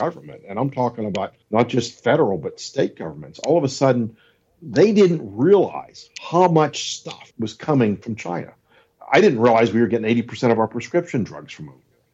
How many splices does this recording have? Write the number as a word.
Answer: one